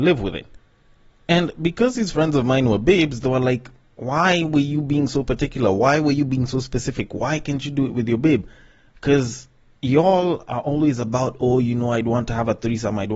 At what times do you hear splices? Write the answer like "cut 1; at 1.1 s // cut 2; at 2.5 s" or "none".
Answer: none